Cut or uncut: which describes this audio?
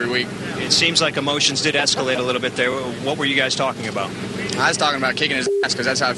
uncut